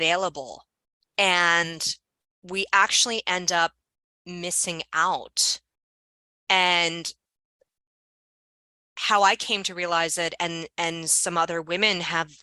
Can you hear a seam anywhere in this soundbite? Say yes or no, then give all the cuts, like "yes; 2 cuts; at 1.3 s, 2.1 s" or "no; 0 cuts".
no; 0 cuts